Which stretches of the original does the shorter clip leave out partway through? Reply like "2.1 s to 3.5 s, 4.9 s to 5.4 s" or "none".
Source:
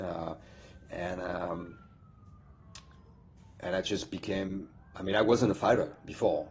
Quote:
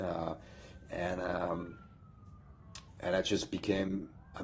2.9 s to 3.5 s